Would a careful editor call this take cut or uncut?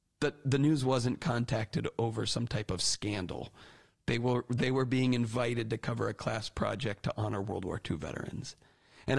uncut